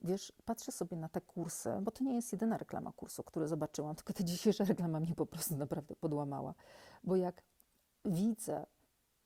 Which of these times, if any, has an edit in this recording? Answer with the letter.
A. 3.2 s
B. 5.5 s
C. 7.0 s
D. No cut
A